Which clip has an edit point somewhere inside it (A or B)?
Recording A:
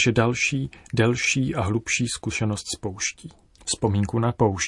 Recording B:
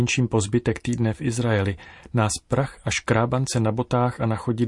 A